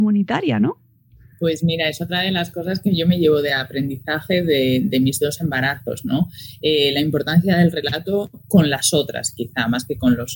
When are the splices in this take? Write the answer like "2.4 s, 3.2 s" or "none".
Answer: none